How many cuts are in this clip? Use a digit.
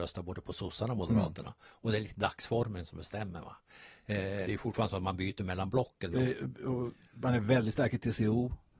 2